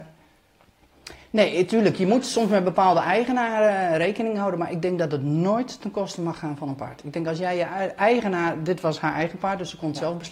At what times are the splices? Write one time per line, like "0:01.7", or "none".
none